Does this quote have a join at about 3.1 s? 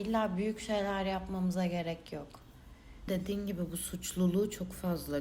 yes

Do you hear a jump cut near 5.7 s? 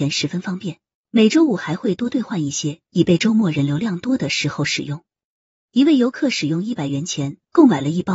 yes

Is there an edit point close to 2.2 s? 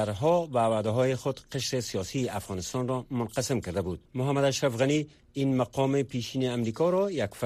no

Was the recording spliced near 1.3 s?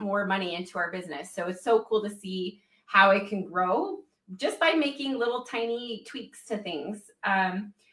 no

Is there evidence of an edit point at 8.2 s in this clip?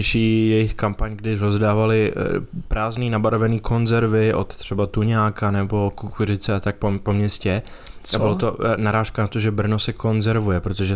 no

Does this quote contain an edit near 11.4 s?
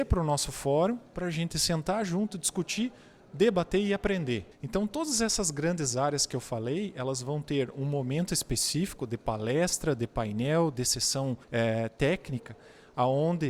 yes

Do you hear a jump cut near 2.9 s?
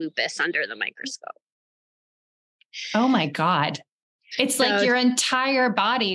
no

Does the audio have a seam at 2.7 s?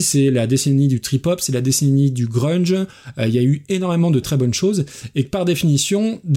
no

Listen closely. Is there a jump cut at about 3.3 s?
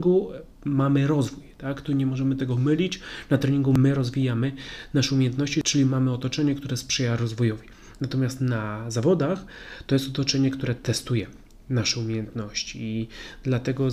no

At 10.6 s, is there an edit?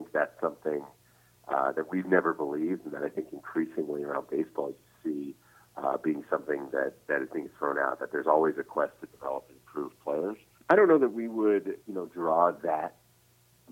yes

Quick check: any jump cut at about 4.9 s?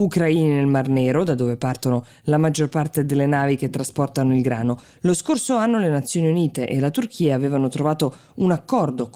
no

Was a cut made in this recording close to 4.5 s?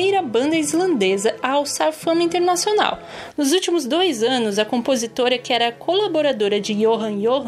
no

